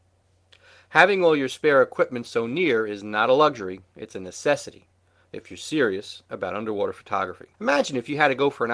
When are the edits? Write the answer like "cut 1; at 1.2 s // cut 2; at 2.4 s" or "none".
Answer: cut 1; at 7.5 s